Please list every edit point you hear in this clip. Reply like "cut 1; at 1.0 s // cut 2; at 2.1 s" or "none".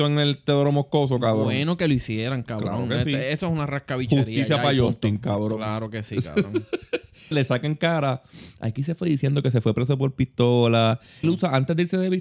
cut 1; at 7.3 s // cut 2; at 11.2 s

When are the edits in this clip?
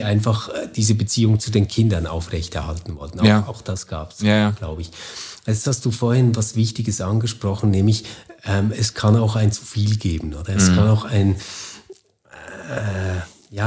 none

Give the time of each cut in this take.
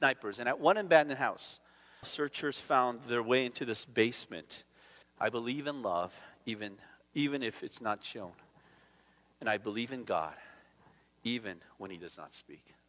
cut 1; at 2.0 s // cut 2; at 5.0 s

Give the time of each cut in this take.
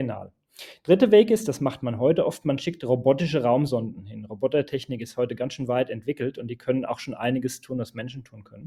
none

